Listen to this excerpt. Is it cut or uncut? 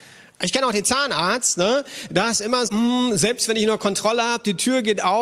cut